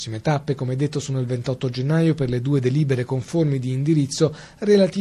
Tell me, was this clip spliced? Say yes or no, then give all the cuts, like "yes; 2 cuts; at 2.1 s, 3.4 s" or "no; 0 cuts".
no; 0 cuts